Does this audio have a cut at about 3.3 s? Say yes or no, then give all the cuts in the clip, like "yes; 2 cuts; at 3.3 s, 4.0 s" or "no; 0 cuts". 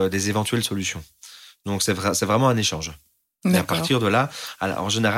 no; 0 cuts